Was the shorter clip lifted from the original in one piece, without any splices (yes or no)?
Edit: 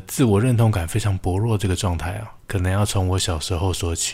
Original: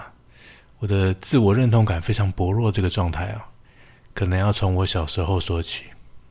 no